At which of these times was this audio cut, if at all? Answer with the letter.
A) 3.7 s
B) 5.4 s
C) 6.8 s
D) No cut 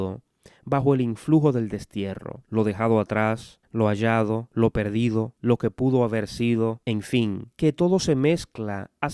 B